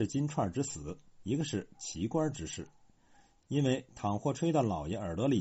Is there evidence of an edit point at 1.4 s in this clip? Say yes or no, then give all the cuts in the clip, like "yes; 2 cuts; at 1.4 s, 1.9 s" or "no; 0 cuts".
no; 1 cut; at 3.4 s